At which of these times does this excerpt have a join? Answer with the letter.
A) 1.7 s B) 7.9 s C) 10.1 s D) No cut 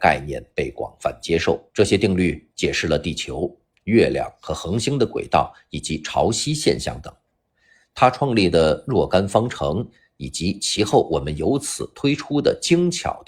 A